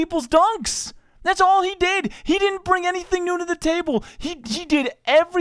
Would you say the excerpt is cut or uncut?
uncut